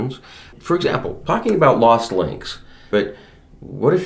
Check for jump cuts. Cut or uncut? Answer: cut